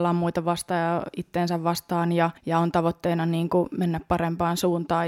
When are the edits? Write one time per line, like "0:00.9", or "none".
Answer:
0:02.4